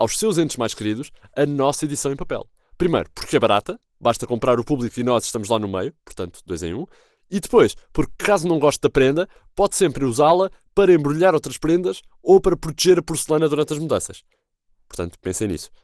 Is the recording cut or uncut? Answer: uncut